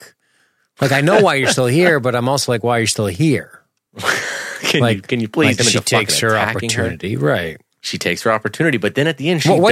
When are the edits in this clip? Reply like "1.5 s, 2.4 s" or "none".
5.6 s